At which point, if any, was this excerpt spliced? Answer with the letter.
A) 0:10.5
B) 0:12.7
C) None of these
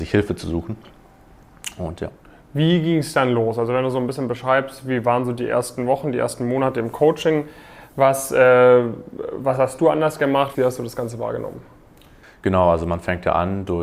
A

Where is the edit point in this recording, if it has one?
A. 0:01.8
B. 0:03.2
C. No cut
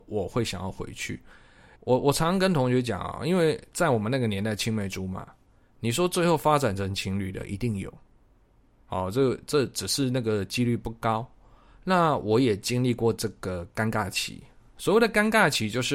A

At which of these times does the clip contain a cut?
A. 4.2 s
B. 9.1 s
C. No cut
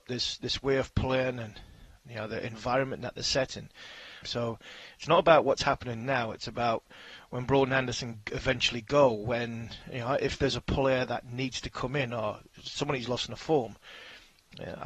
A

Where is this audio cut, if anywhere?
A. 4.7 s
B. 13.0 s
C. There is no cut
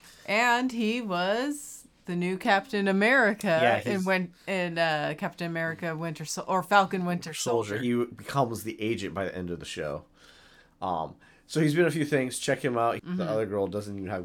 B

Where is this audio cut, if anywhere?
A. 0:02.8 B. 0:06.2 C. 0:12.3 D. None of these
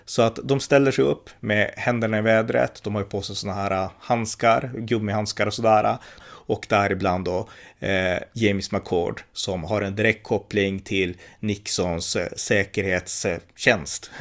B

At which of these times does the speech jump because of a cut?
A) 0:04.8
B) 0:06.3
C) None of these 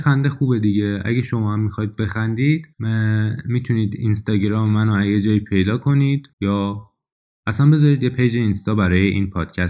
B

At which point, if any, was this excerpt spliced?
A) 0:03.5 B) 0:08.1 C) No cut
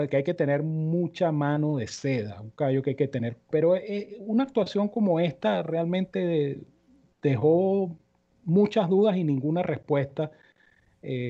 A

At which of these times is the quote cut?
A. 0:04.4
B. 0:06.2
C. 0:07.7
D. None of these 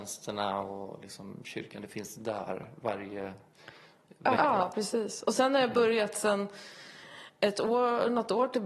A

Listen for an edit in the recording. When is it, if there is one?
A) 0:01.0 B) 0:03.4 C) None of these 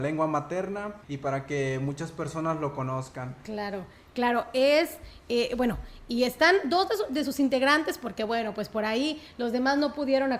A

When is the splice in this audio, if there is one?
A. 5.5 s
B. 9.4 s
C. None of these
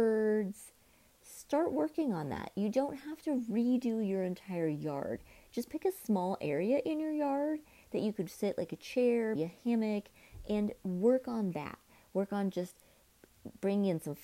B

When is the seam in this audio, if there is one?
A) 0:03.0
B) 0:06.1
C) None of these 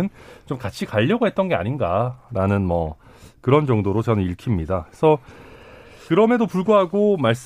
B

